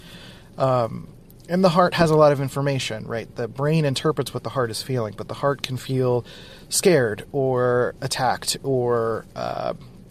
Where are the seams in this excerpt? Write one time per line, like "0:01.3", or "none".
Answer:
none